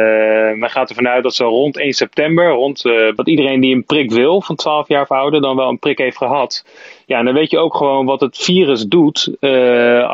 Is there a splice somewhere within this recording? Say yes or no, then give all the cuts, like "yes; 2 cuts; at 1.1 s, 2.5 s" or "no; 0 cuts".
yes; 1 cut; at 3.2 s